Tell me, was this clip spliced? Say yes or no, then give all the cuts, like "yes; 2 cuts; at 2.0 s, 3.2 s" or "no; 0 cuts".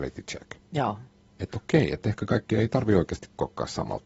no; 0 cuts